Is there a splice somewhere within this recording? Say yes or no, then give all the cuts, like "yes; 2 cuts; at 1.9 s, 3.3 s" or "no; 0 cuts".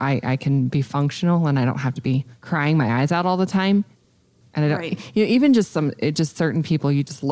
yes; 1 cut; at 4.4 s